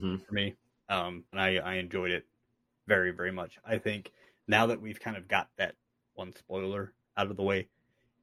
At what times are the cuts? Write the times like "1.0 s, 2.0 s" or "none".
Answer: 1.3 s